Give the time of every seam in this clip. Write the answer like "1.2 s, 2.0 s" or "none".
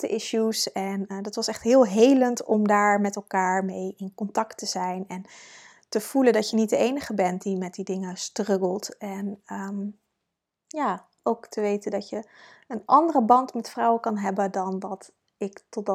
none